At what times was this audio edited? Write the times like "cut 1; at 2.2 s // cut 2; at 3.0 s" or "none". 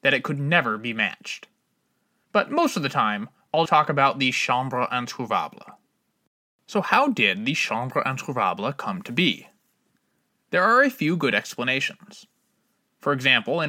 cut 1; at 3.7 s